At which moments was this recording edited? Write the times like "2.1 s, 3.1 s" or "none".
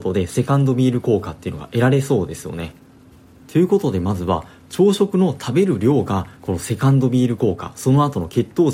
none